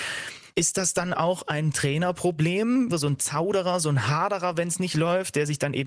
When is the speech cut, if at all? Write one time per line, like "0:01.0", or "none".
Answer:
0:02.9

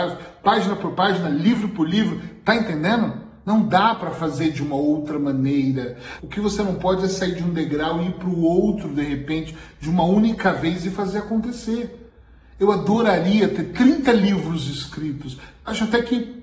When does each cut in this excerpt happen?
0:06.2

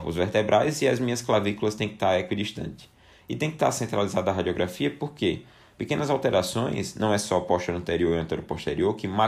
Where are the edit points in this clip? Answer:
none

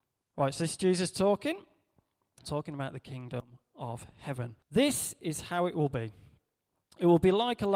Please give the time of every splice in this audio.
0:02.4
0:04.6

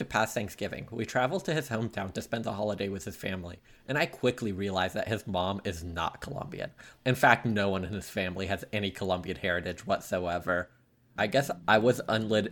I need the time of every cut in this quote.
0:07.0
0:11.2

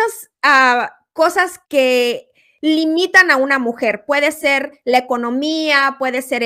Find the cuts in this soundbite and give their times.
0:01.6

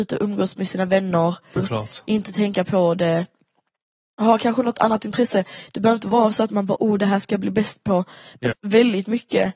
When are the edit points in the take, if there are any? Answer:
0:01.6
0:08.5

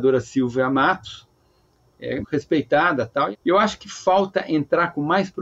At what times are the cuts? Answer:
0:02.2
0:03.3

